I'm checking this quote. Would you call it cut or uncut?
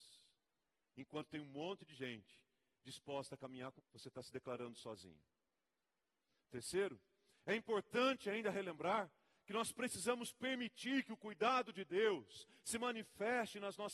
cut